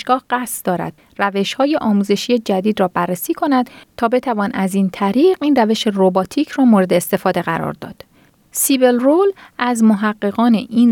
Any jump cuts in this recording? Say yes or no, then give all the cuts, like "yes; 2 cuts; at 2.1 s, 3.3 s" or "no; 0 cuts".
yes; 1 cut; at 8.4 s